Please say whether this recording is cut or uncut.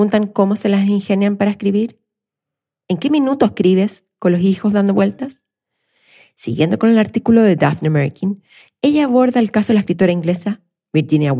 uncut